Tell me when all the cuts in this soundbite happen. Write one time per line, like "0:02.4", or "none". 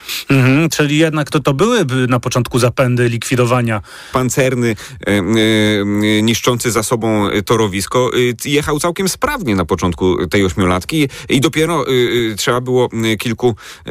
0:01.3
0:04.1